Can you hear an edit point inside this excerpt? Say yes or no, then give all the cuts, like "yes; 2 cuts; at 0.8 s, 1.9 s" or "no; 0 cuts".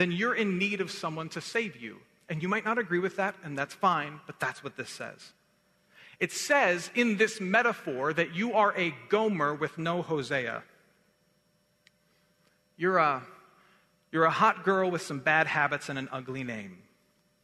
no; 0 cuts